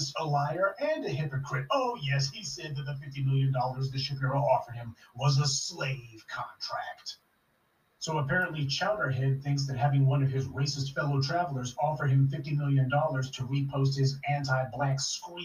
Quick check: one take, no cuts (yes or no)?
yes